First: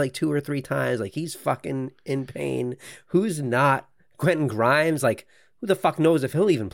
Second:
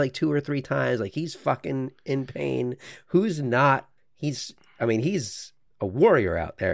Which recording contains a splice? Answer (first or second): second